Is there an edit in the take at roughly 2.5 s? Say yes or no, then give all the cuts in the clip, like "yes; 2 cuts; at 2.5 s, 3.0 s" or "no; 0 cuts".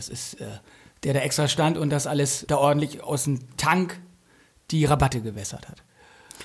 yes; 1 cut; at 2.5 s